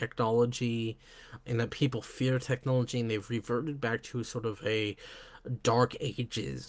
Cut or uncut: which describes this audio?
cut